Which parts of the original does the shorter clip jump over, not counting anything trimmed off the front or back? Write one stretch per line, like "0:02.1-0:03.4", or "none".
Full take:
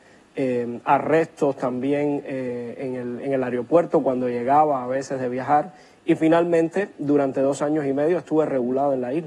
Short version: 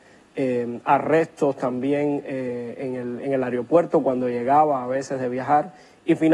none